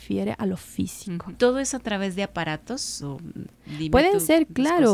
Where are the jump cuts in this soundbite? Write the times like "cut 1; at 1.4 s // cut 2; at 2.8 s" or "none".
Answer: cut 1; at 1.3 s // cut 2; at 3.0 s